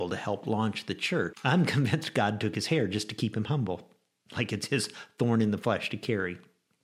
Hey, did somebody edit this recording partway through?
yes; 1 cut; at 1.3 s

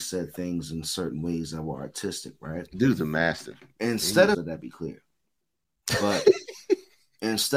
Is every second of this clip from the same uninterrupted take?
no; 1 cut; at 4.3 s

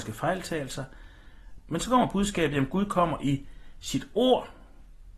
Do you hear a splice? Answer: yes; 1 cut; at 1.6 s

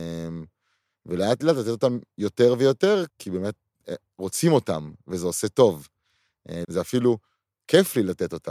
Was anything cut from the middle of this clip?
yes; 2 cuts; at 3.1 s, 6.6 s

